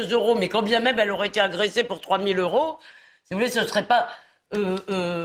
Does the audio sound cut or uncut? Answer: uncut